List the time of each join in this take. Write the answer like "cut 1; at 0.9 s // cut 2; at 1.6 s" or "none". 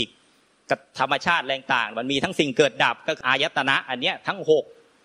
cut 1; at 3.2 s